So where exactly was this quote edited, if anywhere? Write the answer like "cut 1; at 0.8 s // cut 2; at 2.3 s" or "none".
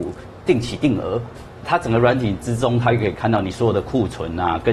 none